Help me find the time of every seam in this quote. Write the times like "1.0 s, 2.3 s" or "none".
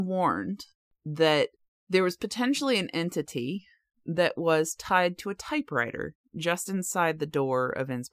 none